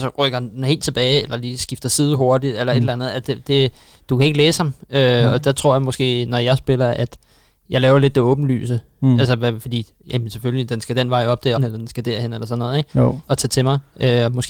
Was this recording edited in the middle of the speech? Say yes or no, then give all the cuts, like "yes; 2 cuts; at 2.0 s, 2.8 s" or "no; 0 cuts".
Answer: yes; 2 cuts; at 11.6 s, 13.3 s